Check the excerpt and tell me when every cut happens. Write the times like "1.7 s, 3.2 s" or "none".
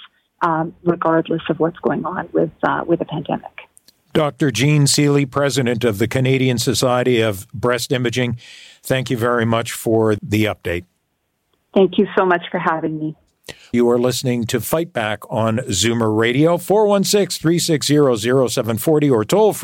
10.2 s, 13.7 s